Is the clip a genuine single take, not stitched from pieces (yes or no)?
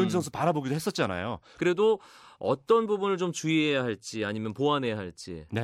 no